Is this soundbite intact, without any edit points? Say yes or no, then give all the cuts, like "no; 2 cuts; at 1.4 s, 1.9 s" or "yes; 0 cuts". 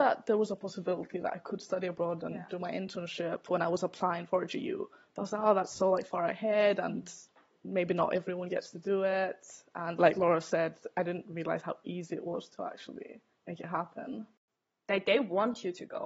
yes; 0 cuts